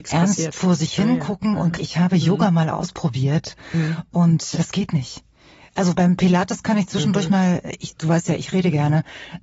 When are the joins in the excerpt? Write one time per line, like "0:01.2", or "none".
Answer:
0:01.8
0:05.9